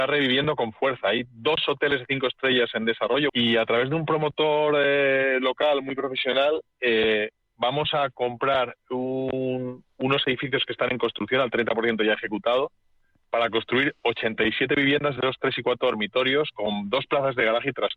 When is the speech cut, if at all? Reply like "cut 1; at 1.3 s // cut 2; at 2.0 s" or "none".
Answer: cut 1; at 3.3 s